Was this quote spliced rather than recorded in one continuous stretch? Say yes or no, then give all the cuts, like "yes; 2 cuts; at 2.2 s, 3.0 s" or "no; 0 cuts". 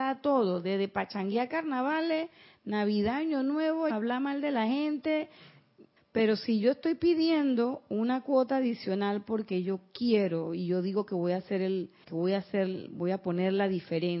yes; 3 cuts; at 3.9 s, 6.0 s, 12.0 s